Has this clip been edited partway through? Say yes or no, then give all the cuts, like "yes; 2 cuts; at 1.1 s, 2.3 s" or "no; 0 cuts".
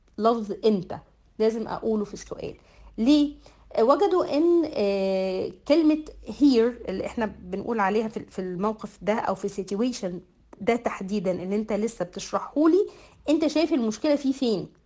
no; 0 cuts